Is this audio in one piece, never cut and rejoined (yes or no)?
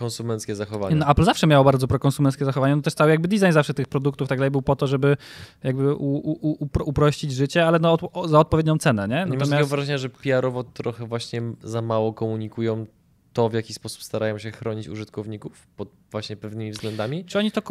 yes